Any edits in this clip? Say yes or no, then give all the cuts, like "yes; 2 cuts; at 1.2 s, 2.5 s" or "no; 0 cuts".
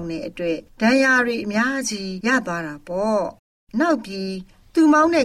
no; 0 cuts